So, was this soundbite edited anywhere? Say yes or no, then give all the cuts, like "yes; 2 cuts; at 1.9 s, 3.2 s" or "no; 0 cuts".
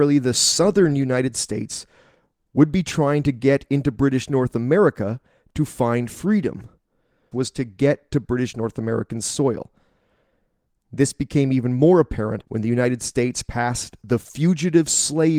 yes; 2 cuts; at 7.3 s, 12.4 s